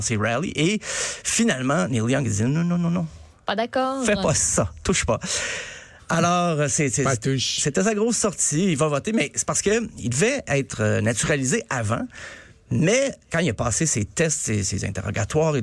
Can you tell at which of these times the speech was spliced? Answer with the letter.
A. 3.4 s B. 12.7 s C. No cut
C